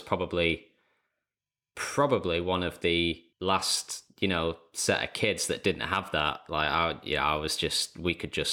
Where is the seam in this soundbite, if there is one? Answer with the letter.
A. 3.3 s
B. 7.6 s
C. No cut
A